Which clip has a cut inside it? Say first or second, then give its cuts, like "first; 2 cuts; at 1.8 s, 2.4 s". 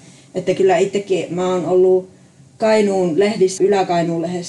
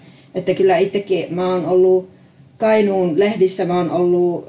first; 1 cut; at 3.6 s